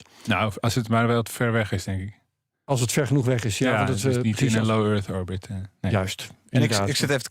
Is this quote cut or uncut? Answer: uncut